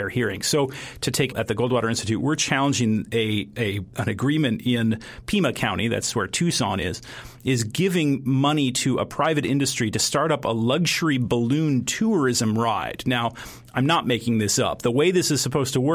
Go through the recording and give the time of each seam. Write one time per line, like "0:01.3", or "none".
0:01.3